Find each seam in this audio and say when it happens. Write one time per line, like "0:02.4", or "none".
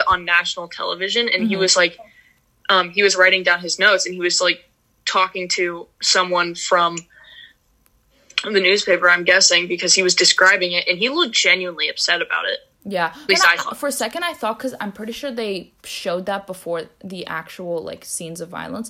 0:13.3